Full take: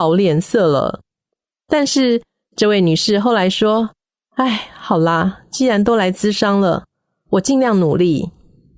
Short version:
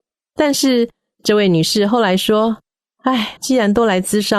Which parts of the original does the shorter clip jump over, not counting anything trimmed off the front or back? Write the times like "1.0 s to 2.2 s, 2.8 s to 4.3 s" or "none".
4.7 s to 5.5 s